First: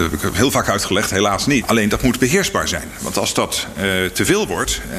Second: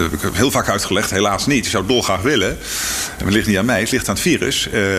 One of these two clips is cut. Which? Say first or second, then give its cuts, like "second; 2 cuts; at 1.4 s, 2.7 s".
first; 1 cut; at 1.6 s